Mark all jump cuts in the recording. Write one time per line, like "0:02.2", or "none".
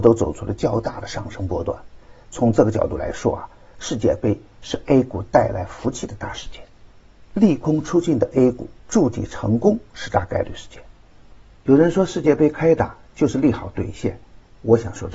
0:08.8

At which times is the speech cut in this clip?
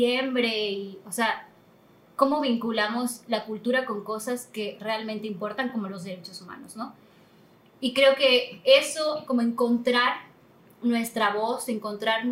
none

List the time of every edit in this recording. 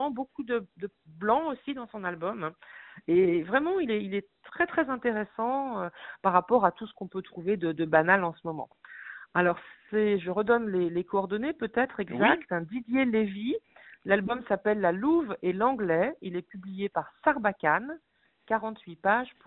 none

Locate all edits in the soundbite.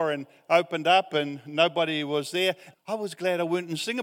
0:02.7

